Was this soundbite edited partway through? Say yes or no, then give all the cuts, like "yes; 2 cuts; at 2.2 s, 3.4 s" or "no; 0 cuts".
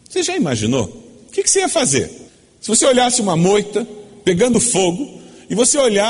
no; 0 cuts